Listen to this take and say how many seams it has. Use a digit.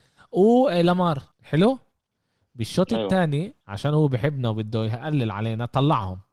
2